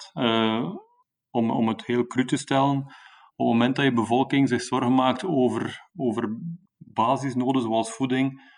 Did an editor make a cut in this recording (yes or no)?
no